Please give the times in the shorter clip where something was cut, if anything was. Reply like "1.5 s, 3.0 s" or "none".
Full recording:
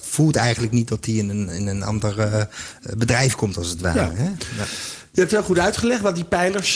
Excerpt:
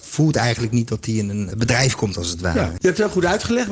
1.5 s, 2.8 s